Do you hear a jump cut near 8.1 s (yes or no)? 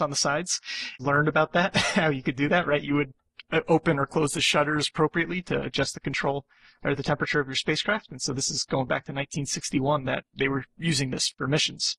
no